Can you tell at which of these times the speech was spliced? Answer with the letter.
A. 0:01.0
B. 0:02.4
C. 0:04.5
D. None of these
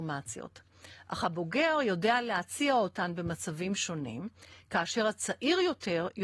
D